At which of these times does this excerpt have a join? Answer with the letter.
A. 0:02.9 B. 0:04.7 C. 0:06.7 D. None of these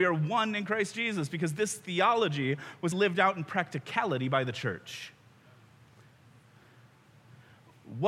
A